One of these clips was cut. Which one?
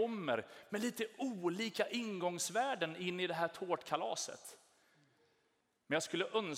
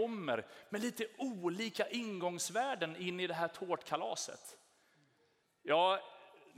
second; 1 cut; at 5.4 s

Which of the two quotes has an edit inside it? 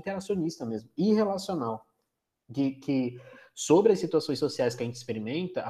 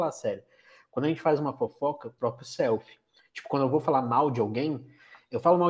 second; 1 cut; at 2.2 s

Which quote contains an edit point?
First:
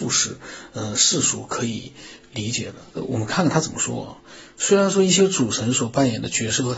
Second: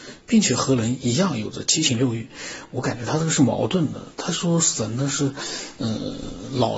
first; 1 cut; at 2.9 s

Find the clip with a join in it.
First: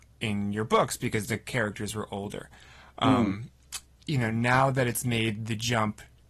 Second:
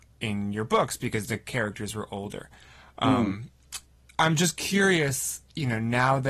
first; 1 cut; at 4.0 s

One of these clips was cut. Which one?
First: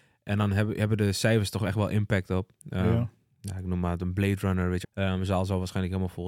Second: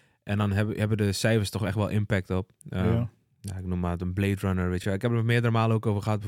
first; 1 cut; at 4.8 s

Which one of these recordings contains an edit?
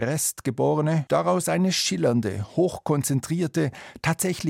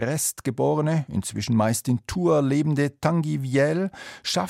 first; 1 cut; at 1.1 s

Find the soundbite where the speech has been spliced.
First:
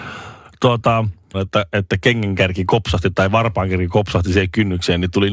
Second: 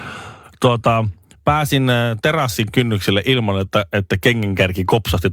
first; 1 cut; at 1.3 s

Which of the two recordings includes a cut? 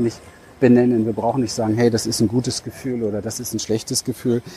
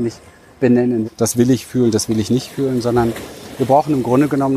second; 1 cut; at 1.0 s

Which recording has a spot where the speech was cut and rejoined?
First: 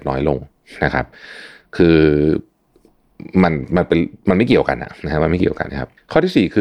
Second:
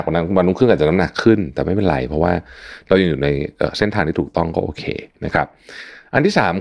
first; 1 cut; at 5.7 s

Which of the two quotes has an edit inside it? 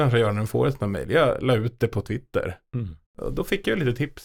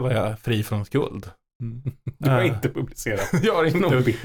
first; 1 cut; at 3.1 s

